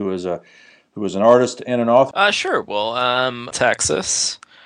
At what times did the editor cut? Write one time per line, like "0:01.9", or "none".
0:02.1
0:03.5